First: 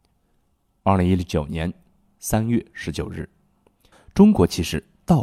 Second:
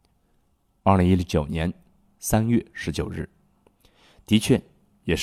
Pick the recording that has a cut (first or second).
first